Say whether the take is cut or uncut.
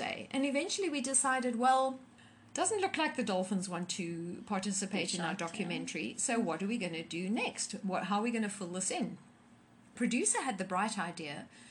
uncut